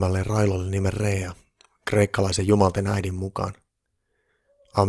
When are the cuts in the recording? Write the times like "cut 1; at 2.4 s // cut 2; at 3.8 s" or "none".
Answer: none